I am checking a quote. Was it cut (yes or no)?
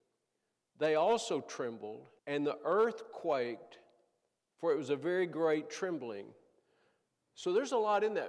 yes